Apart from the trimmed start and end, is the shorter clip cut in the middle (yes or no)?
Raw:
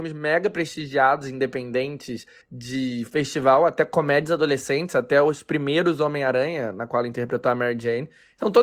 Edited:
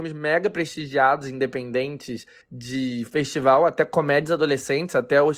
no